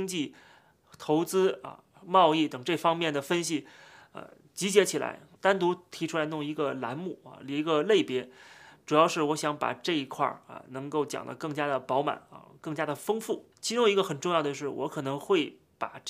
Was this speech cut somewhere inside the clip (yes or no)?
yes